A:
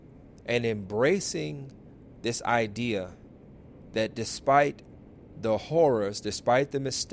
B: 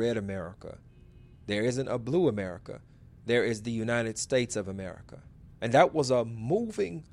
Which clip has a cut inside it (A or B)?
B